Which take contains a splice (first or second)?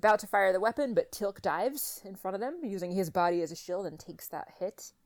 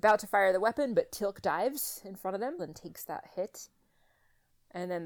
second